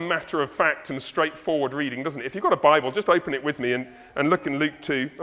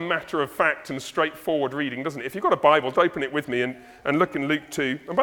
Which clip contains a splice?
second; 1 cut; at 2.9 s

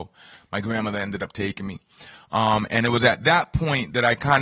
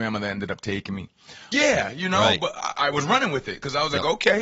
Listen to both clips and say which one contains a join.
second; 1 cut; at 1.5 s

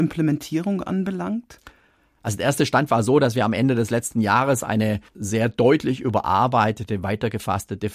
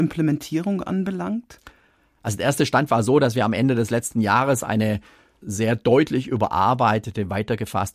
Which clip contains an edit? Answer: first; 1 cut; at 5.1 s

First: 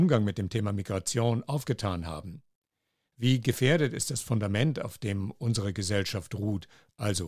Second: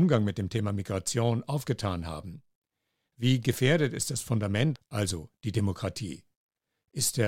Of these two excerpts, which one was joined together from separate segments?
second; 1 cut; at 4.8 s

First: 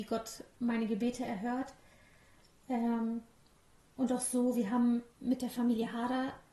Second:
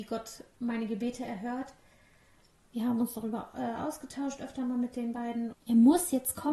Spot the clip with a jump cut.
second; 2 cuts; at 2.5 s, 5.5 s

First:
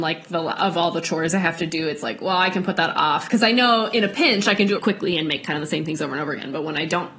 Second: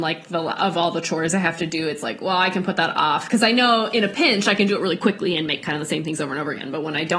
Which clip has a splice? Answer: first; 1 cut; at 4.8 s

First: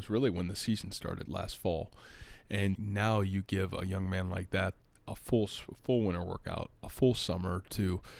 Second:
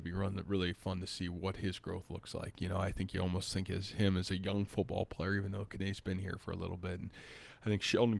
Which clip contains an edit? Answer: first; 3 cuts; at 1.3 s, 2.8 s, 6.8 s

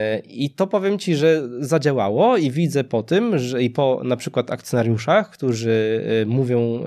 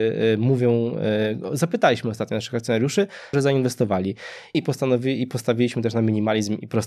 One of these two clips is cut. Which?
second; 2 cuts; at 3.3 s, 4.5 s

